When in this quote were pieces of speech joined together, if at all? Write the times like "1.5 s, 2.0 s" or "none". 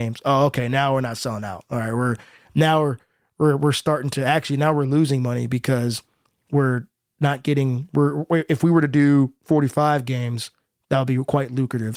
none